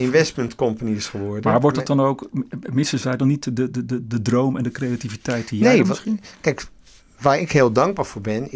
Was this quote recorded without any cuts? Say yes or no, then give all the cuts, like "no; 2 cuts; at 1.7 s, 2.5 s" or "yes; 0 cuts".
yes; 0 cuts